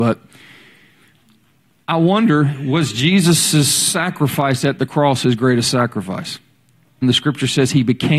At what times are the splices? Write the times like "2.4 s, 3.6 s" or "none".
7.0 s